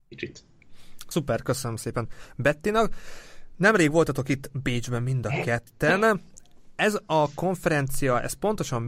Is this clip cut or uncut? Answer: uncut